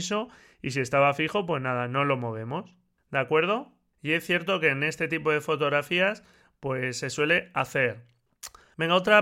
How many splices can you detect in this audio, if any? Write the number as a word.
zero